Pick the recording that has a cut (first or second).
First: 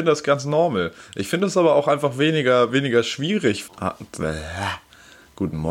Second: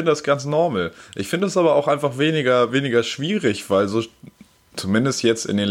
first